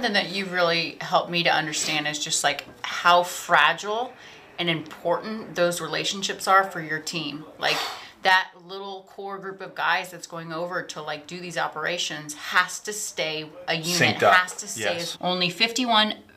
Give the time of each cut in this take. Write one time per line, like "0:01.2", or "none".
0:15.1